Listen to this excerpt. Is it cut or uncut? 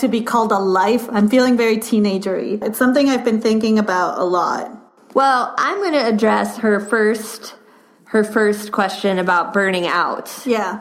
cut